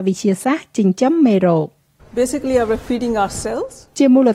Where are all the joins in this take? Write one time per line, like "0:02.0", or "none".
none